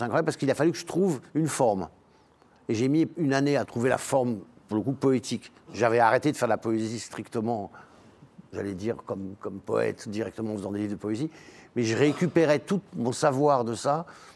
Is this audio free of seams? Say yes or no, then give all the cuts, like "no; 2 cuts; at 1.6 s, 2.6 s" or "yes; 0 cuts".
yes; 0 cuts